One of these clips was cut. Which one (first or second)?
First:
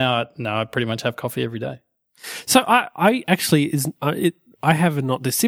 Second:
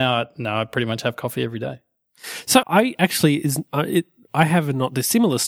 second